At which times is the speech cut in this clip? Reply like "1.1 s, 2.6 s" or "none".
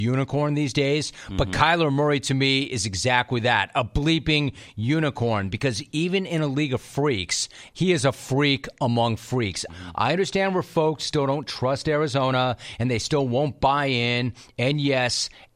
7.7 s, 9.7 s